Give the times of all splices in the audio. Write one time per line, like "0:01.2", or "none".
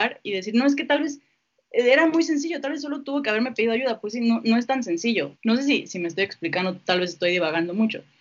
0:05.4